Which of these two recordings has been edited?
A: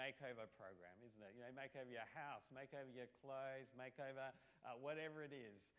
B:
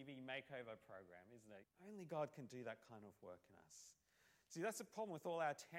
B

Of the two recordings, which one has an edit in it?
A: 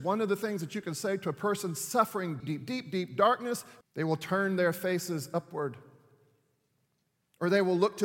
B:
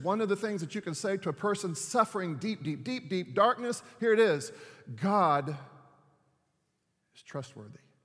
A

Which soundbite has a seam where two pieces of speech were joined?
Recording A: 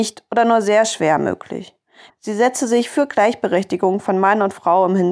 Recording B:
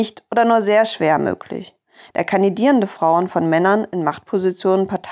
A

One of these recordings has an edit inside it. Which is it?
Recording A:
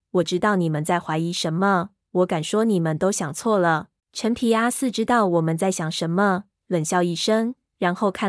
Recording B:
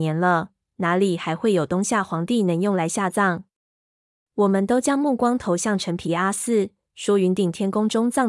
A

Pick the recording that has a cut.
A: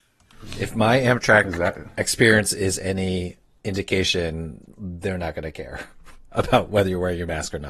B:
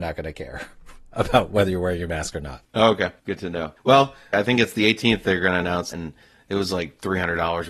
B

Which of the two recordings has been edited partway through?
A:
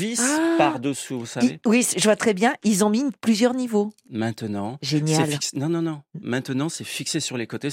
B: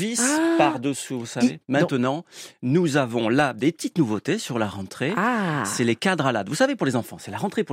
B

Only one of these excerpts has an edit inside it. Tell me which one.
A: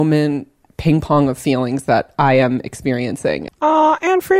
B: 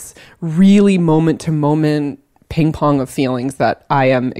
A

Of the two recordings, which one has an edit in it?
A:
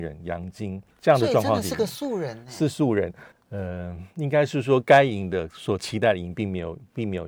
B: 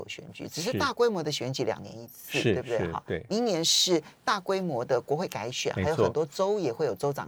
A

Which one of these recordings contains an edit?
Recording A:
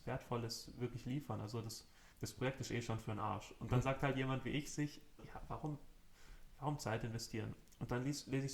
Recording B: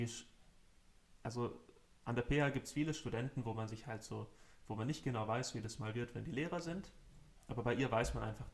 A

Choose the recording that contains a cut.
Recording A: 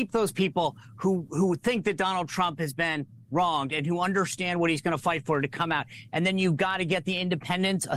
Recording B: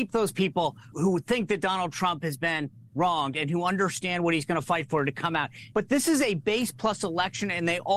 B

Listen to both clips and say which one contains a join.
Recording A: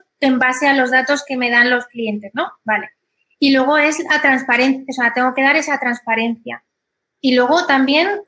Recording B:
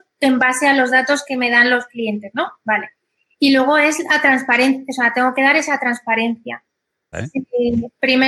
B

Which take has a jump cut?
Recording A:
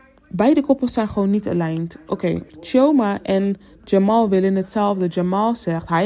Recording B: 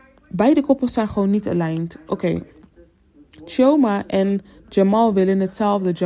A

